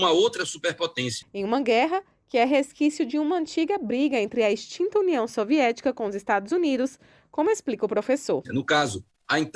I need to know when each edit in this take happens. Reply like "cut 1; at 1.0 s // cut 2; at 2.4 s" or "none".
cut 1; at 1.2 s // cut 2; at 8.4 s